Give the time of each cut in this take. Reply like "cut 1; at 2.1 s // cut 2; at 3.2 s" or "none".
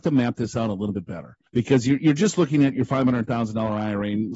cut 1; at 1.5 s